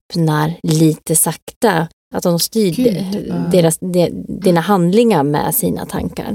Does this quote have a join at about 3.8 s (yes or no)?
no